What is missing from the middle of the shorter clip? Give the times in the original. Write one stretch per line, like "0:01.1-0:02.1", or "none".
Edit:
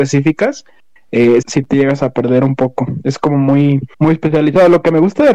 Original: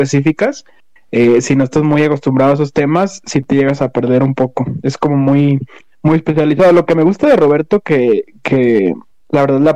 0:01.4-0:03.2
0:05.7-0:06.0